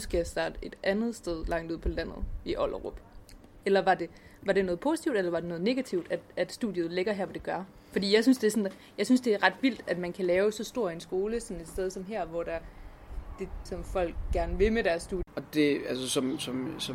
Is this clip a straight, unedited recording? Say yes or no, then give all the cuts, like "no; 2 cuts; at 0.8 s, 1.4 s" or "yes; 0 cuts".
no; 2 cuts; at 13.7 s, 15.3 s